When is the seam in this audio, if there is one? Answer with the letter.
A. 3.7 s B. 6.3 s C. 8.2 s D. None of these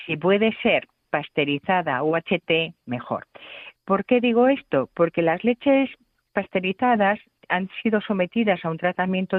D